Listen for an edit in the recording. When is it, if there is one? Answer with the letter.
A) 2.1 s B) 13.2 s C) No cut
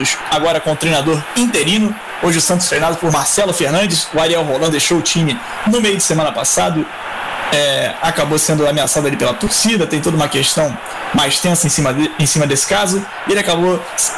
C